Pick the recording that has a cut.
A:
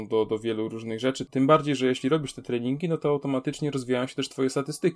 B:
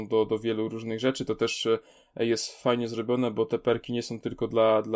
A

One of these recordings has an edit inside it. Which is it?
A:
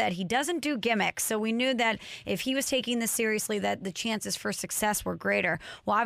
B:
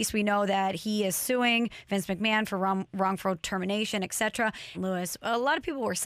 B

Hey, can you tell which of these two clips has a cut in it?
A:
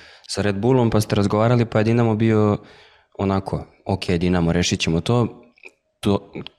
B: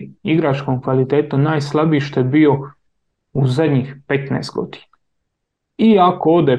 B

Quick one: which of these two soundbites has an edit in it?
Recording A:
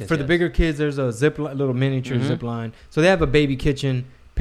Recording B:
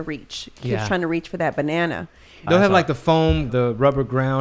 B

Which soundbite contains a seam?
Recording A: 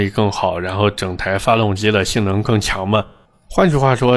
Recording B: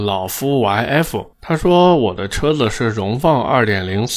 B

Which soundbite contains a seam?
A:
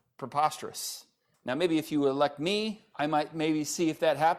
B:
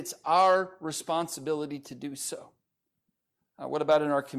A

